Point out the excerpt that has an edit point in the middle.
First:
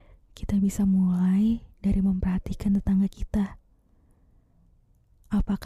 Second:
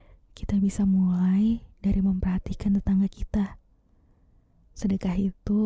second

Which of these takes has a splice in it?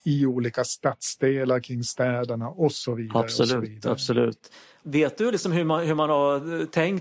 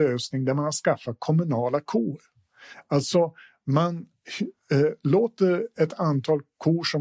first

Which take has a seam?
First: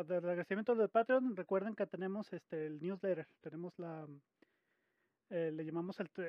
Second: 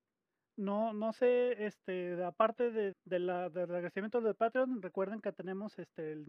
second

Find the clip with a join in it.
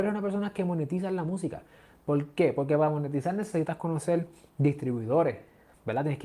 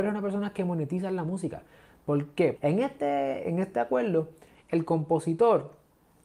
second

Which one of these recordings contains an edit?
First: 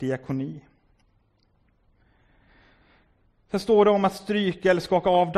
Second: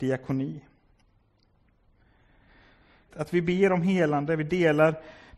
second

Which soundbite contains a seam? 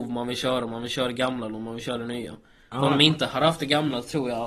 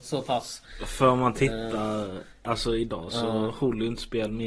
second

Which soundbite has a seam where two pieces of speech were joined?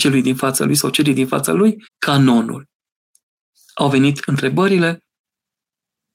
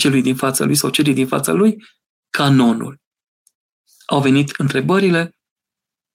first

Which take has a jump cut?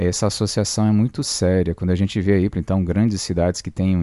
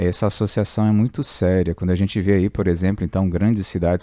first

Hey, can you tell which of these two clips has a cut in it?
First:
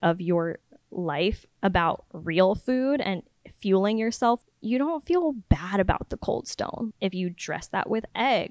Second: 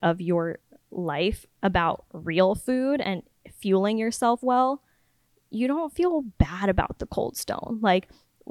first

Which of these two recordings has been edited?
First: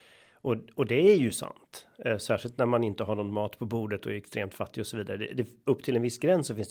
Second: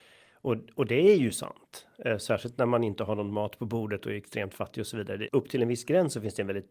second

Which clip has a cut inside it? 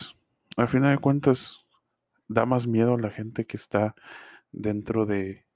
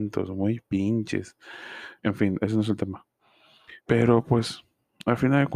second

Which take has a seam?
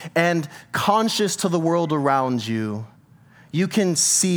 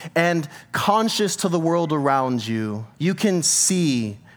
second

